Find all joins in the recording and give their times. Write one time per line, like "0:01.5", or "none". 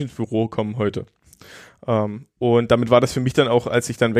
none